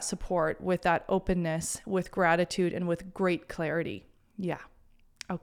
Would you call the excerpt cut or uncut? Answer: uncut